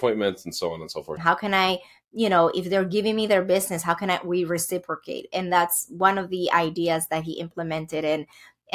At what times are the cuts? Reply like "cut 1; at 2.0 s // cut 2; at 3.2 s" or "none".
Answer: cut 1; at 1.2 s